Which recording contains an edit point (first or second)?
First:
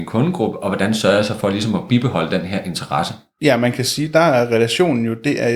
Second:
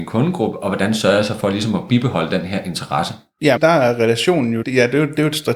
second